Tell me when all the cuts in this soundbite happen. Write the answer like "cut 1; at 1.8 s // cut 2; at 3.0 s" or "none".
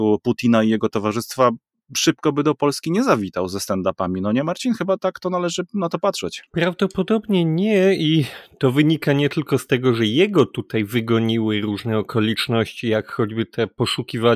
cut 1; at 6.5 s